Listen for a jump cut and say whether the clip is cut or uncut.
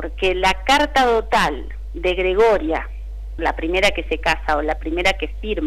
cut